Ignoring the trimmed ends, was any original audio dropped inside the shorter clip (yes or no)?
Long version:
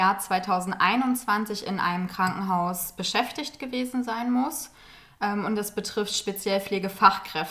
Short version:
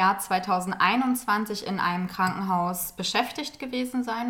no